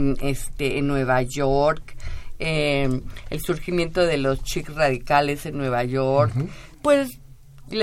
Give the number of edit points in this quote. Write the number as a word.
one